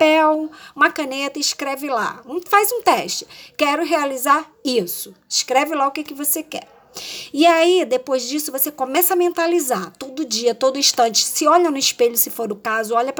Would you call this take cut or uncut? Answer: uncut